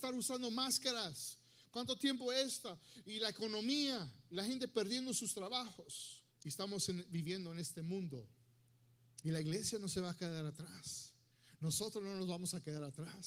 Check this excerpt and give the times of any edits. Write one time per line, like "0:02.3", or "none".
0:06.3
0:09.2

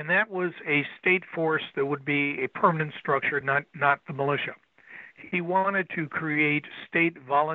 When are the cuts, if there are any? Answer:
none

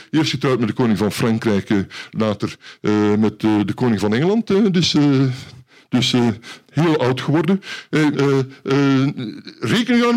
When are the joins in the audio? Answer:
0:06.6
0:08.1

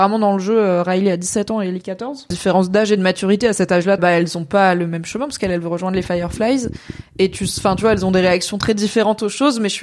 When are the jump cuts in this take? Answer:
0:02.3
0:04.0

